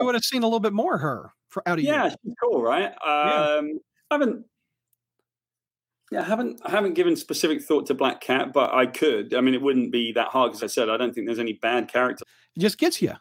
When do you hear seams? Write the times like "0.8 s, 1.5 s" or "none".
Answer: 10.6 s, 12.2 s